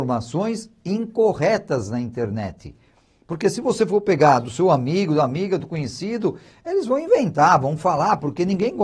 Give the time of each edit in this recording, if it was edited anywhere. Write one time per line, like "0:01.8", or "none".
none